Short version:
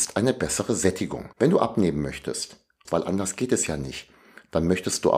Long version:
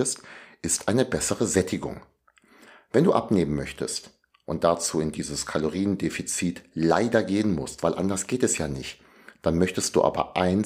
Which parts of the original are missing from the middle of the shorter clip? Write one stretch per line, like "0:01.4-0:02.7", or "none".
0:02.0-0:02.9
0:04.4-0:07.8